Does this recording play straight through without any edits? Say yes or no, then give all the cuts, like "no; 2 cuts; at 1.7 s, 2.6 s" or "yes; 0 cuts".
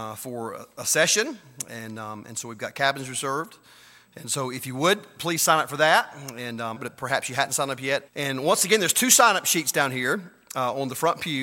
no; 2 cuts; at 6.8 s, 8.1 s